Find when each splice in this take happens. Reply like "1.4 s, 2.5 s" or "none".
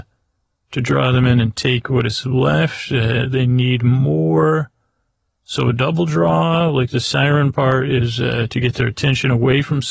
none